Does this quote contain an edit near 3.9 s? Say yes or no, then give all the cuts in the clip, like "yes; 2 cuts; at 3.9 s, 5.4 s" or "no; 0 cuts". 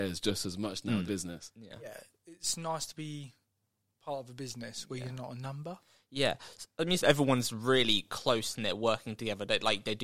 no; 2 cuts; at 1.0 s, 7.0 s